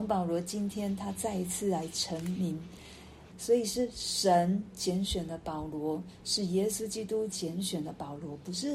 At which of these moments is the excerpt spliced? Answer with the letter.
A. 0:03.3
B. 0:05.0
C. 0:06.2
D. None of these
A